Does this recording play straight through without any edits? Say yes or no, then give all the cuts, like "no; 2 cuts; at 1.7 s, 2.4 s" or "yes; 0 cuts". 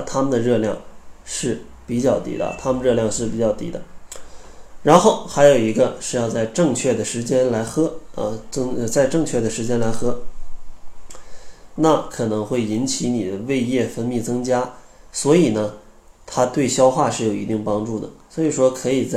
no; 1 cut; at 11.8 s